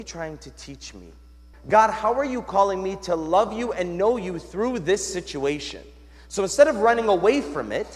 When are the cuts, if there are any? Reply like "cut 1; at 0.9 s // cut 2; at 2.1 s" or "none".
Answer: cut 1; at 1.5 s